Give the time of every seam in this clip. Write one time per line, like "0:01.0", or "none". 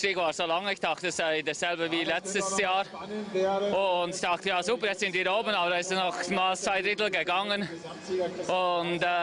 none